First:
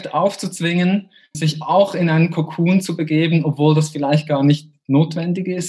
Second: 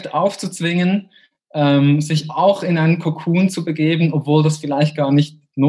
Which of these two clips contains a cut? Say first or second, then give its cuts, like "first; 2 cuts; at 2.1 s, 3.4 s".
first; 1 cut; at 1.3 s